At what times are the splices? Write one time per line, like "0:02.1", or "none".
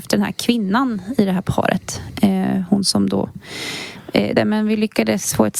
0:04.4